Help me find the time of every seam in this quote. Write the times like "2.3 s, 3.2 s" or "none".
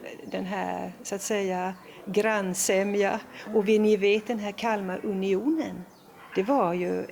none